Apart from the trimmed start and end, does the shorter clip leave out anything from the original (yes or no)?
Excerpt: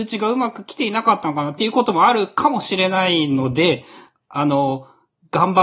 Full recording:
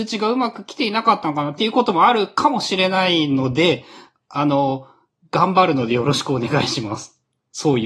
no